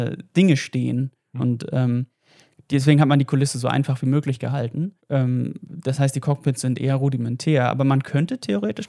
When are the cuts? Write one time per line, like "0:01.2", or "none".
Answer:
0:01.4
0:05.0